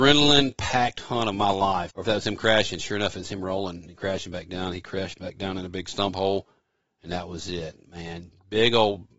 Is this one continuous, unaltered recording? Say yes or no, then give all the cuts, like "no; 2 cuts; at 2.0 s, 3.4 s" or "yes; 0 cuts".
no; 1 cut; at 1.9 s